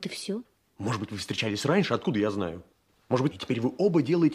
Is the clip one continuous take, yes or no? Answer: no